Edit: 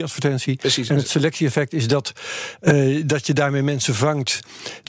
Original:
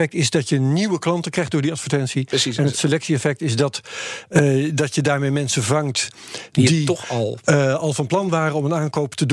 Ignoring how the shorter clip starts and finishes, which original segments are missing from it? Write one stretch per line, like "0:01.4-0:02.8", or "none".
none